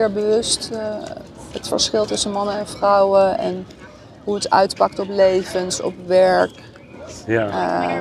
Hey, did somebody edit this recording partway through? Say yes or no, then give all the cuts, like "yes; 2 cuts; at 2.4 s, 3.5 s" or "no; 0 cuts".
no; 0 cuts